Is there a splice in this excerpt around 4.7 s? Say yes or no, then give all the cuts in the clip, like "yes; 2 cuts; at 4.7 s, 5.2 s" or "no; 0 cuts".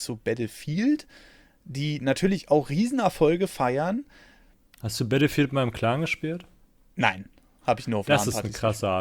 yes; 1 cut; at 4.7 s